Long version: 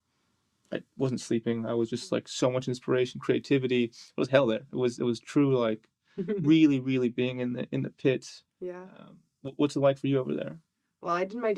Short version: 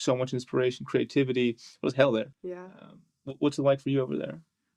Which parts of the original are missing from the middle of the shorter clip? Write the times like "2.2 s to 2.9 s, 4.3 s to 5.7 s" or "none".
4.7 s to 8.5 s